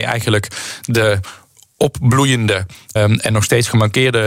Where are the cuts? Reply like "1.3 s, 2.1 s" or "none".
3.0 s

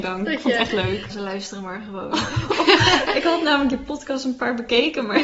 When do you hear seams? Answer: 1.1 s

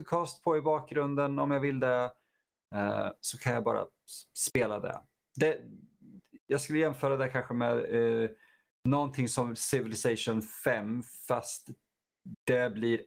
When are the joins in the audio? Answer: none

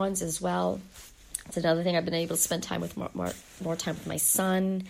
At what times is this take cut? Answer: none

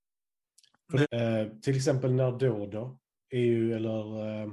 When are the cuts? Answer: 1.0 s

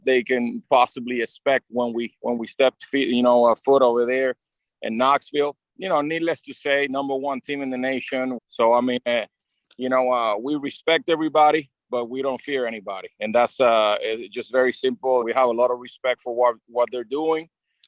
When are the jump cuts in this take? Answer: 8.4 s, 15.2 s

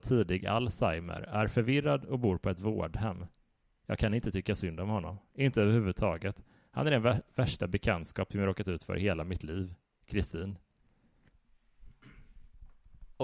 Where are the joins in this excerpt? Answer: none

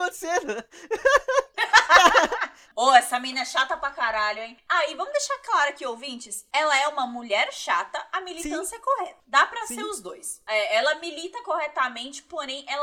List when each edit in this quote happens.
none

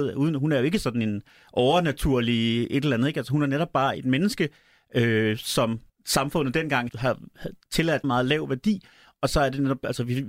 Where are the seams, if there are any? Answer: 6.9 s, 8.0 s

